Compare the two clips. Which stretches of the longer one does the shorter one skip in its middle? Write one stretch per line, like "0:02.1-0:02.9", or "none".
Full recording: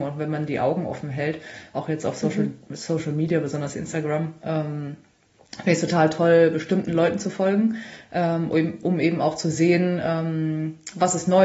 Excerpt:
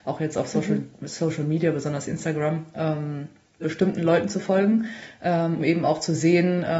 0:05.3-0:06.5
0:08.5-0:08.9